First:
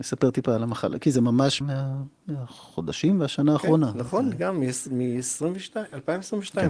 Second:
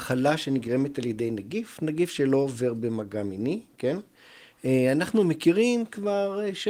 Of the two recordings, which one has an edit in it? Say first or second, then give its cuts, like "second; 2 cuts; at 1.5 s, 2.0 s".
first; 1 cut; at 1.6 s